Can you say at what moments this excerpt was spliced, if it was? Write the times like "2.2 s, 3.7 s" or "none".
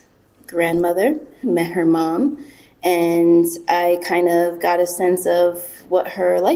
1.4 s